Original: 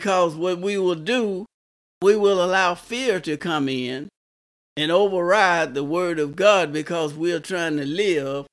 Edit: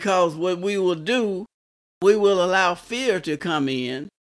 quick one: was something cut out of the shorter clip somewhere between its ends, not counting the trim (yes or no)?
no